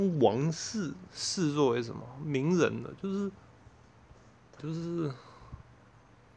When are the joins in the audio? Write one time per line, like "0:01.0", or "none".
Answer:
0:04.6